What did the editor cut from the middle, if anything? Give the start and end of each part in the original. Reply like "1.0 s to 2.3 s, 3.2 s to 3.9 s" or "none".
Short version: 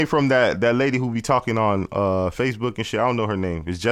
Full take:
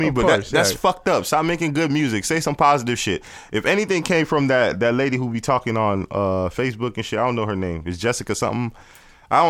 none